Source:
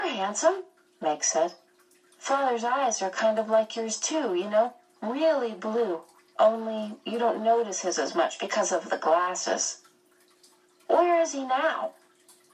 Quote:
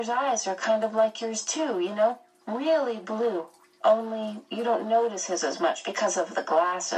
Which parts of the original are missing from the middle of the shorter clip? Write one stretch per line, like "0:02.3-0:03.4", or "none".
none